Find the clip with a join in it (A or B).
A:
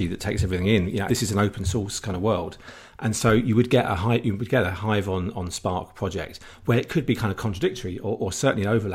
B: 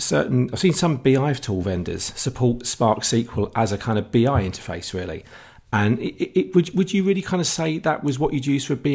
A